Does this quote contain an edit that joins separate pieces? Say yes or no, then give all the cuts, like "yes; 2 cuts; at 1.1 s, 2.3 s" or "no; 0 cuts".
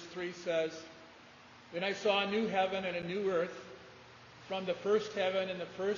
no; 0 cuts